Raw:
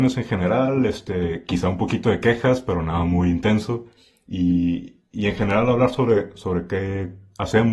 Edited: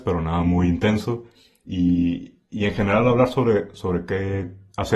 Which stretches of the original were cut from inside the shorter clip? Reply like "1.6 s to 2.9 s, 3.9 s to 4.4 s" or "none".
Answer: none